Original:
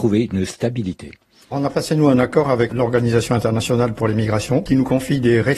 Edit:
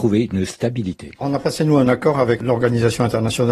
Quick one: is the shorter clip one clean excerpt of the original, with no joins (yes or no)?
no